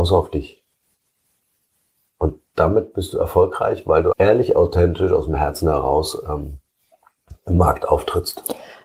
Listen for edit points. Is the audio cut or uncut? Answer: cut